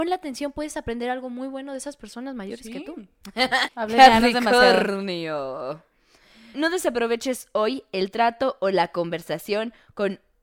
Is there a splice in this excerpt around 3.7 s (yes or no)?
yes